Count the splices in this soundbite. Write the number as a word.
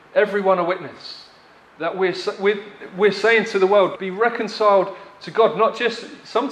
one